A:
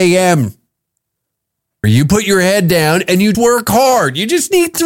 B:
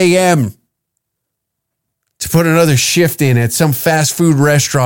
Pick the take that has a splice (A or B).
A